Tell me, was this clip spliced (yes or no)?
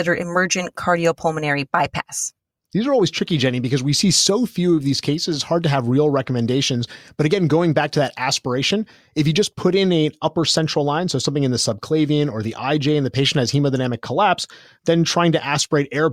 no